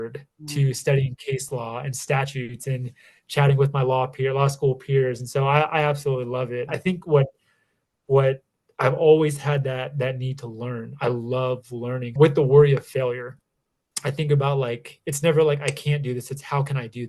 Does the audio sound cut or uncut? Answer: cut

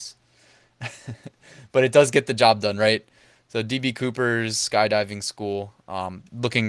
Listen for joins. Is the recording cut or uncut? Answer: uncut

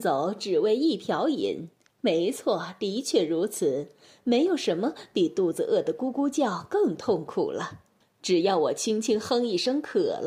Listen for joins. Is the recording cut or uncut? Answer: cut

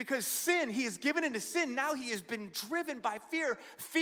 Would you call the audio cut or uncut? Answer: uncut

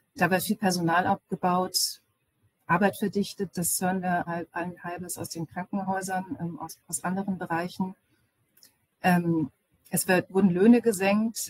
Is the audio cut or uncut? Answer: cut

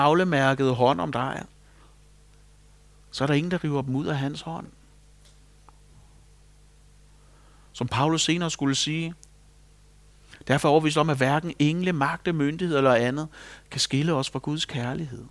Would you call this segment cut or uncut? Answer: uncut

